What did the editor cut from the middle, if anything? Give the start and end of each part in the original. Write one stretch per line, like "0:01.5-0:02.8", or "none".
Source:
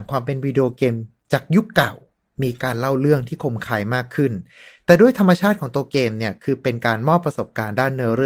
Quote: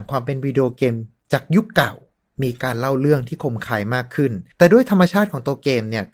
0:04.5-0:04.8